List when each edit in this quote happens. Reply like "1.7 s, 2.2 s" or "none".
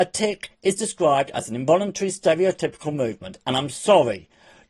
none